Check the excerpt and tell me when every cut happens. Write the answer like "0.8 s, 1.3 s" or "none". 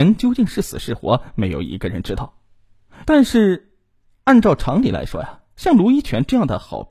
3.0 s